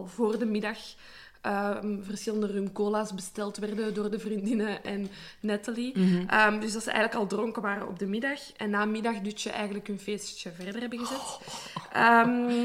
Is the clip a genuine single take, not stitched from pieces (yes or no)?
yes